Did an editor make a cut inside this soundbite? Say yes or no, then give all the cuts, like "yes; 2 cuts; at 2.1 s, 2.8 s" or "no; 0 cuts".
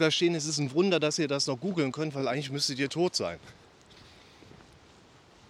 no; 0 cuts